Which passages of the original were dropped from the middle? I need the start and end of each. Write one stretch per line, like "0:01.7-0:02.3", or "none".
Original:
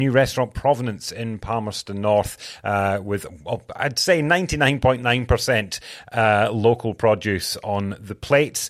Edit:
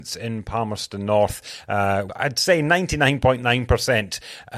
0:03.0-0:03.7